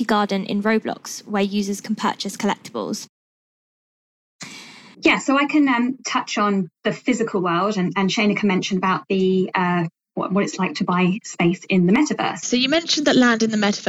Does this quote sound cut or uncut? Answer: cut